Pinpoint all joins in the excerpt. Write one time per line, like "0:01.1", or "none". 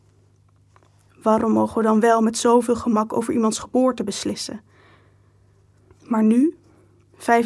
0:05.9